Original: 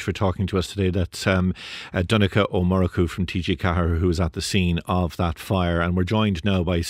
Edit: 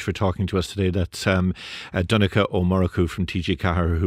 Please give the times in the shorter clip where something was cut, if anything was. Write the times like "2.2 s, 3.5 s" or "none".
none